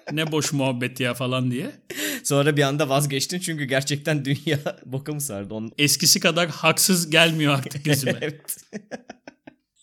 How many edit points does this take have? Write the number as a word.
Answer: one